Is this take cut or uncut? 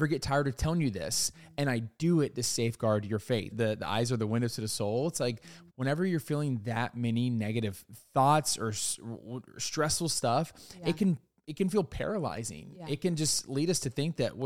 cut